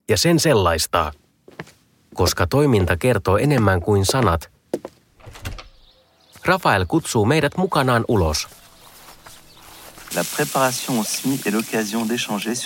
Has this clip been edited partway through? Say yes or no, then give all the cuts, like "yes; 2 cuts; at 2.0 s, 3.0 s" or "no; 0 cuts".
yes; 1 cut; at 10.1 s